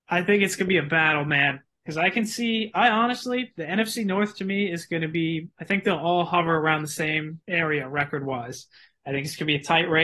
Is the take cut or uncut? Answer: cut